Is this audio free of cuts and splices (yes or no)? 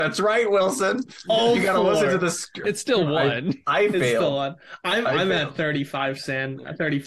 no